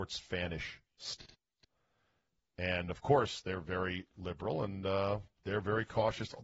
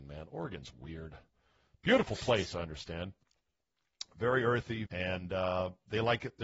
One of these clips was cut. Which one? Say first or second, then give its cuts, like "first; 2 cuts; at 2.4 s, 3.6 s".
second; 1 cut; at 4.9 s